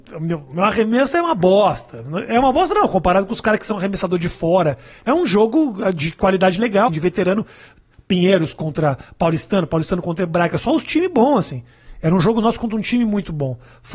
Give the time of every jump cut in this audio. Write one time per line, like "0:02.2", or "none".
0:06.9